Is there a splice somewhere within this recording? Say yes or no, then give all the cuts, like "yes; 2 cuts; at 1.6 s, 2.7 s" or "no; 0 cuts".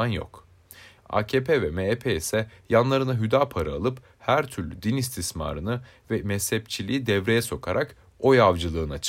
yes; 1 cut; at 1.0 s